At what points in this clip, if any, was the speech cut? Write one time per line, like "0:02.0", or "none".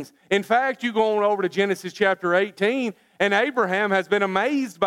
none